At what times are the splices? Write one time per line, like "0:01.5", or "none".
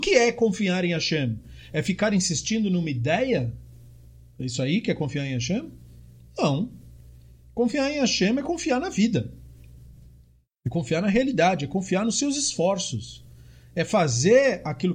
none